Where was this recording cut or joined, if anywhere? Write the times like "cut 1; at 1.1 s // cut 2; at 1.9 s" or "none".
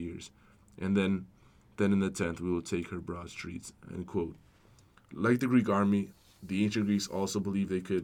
none

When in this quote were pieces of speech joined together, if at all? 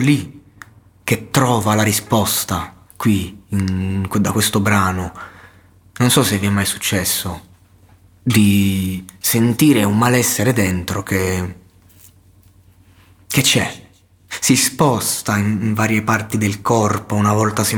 cut 1; at 2.9 s

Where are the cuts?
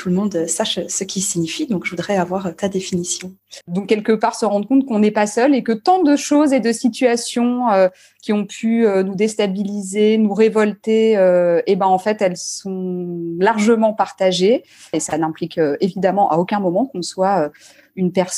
cut 1; at 3.6 s // cut 2; at 14.9 s

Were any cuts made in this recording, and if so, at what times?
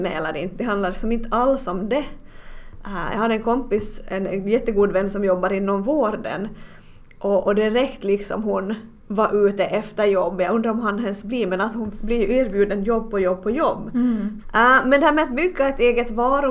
cut 1; at 9.0 s // cut 2; at 14.4 s

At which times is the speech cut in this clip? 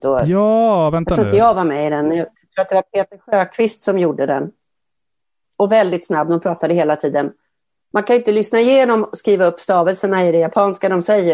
cut 1; at 5.4 s // cut 2; at 7.9 s

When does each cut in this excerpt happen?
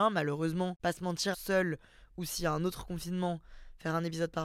cut 1; at 1.3 s

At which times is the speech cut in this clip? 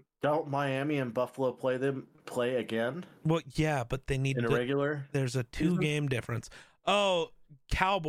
none

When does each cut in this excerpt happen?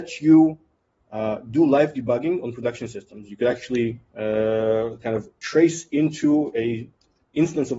none

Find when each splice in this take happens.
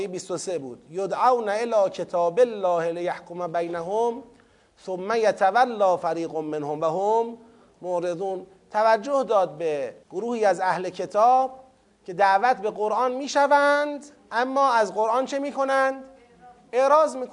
cut 1; at 10.0 s

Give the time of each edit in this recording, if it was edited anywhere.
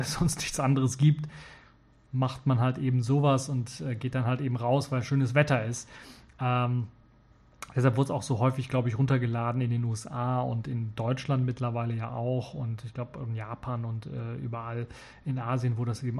none

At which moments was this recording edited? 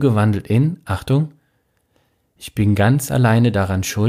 none

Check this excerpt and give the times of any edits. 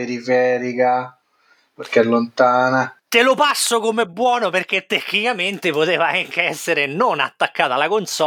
cut 1; at 3.0 s

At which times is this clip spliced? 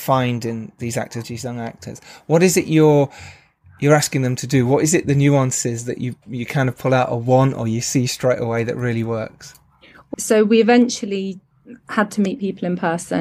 cut 1; at 1.2 s // cut 2; at 10.1 s

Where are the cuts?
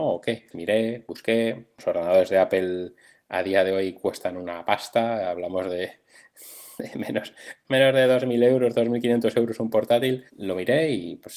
cut 1; at 10.3 s

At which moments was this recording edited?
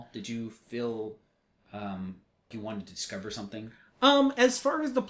cut 1; at 2.5 s

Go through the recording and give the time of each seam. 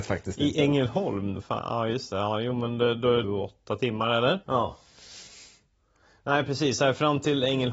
cut 1; at 3.2 s // cut 2; at 4.4 s

